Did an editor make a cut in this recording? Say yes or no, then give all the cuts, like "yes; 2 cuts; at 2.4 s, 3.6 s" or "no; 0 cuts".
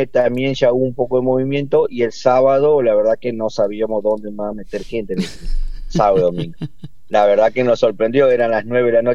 no; 0 cuts